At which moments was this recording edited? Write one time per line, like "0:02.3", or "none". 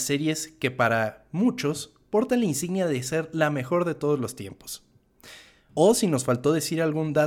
0:05.7

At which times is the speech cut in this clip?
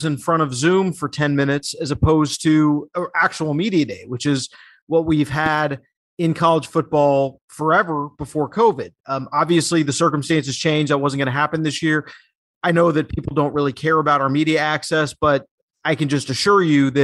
none

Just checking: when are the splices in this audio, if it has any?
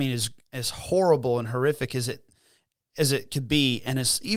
none

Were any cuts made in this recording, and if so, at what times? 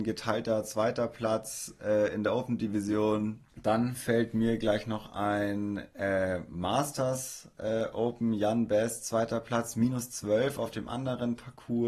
0:03.5

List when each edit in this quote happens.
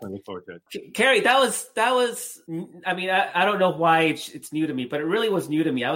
none

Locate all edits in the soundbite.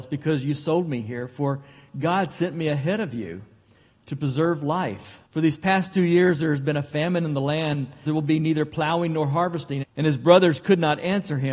0:05.3
0:08.0
0:09.8

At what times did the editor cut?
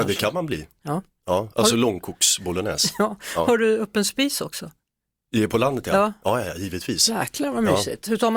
none

